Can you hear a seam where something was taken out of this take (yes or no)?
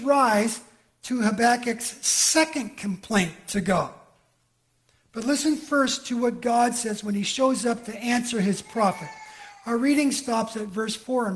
no